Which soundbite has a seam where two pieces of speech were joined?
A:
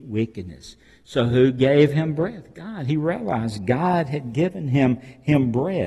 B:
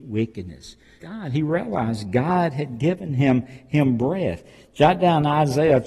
B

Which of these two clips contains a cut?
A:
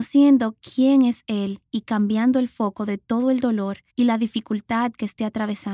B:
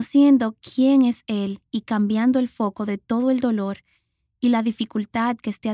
A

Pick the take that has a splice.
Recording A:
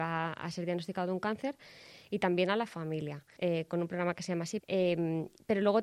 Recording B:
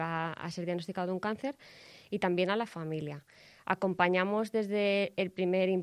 A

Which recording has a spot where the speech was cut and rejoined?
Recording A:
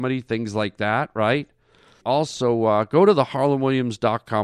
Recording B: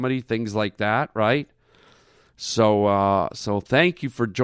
A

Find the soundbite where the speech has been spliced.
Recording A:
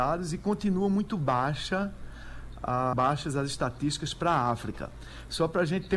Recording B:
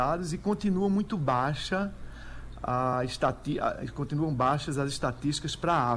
A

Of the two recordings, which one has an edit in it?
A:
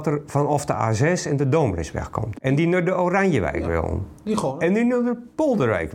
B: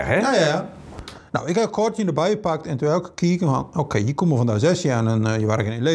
A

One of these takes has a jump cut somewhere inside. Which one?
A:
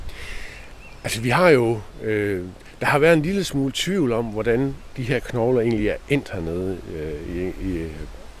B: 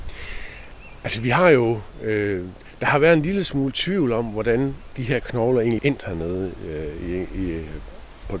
B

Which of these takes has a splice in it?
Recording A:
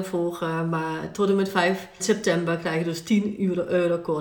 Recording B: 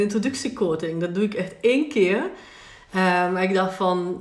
A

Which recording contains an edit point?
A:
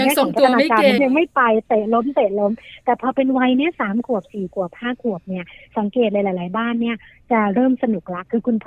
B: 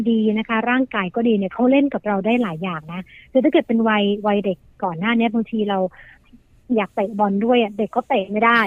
A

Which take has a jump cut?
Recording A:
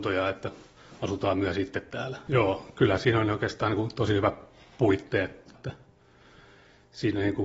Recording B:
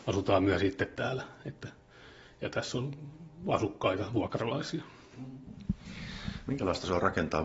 A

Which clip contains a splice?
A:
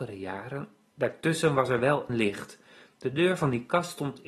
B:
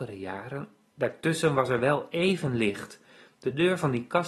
A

